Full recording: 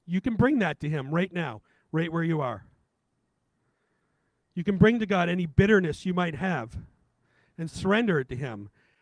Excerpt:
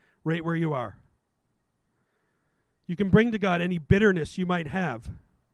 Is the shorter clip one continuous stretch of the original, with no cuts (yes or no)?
yes